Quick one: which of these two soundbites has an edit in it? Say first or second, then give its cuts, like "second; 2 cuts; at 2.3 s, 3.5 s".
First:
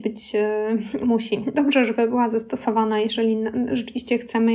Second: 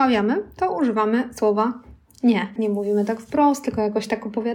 second; 1 cut; at 2.6 s